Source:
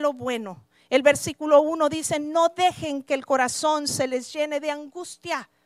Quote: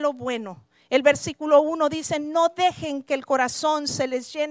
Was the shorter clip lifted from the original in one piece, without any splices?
yes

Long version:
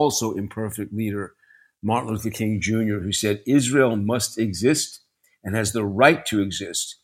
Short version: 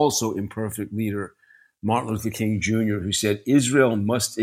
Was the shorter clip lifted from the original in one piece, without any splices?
yes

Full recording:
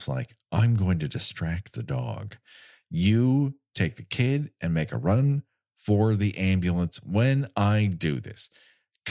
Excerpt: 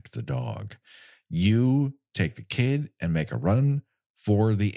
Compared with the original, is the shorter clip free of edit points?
yes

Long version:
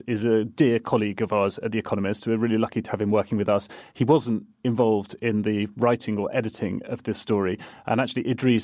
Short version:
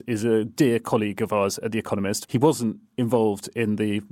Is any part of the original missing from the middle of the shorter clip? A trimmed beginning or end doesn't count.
yes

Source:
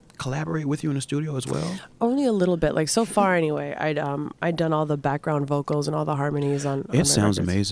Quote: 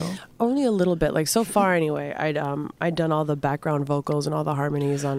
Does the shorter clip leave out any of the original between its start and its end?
no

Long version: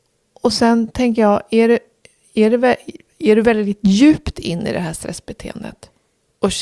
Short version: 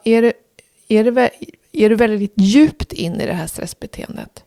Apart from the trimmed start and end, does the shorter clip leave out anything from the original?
no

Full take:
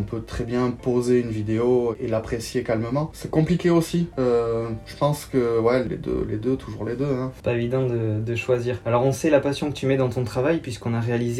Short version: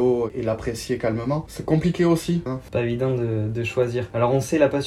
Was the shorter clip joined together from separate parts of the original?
yes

